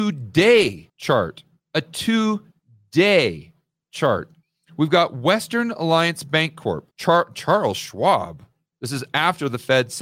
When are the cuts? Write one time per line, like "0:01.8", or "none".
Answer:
0:06.9
0:08.7